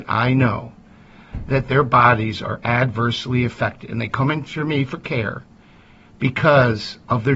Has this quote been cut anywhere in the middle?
no; 0 cuts

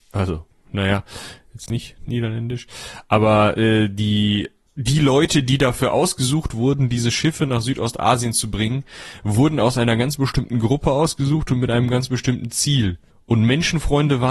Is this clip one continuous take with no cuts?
yes; 0 cuts

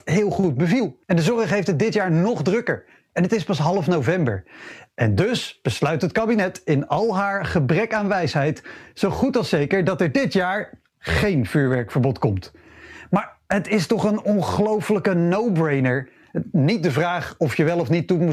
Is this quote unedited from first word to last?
no; 1 cut; at 1.0 s

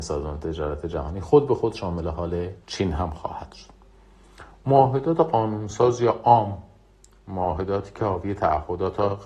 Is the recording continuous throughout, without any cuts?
no; 1 cut; at 2.6 s

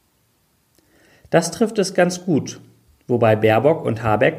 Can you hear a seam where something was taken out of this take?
no; 0 cuts

